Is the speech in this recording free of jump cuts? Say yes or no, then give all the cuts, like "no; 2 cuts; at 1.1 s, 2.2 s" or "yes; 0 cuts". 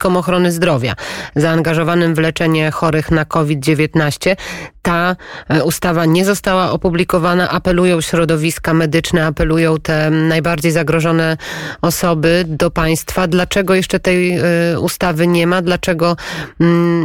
yes; 0 cuts